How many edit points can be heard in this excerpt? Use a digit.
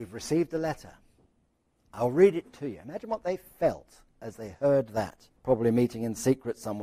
1